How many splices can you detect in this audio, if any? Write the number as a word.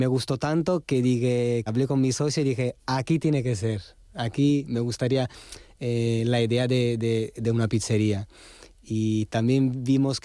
one